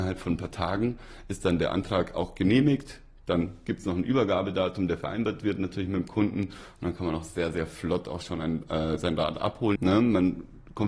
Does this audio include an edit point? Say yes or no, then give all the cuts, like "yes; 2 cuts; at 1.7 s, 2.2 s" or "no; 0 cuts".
yes; 1 cut; at 9.8 s